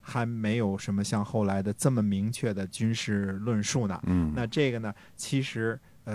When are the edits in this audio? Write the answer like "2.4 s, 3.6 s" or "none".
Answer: none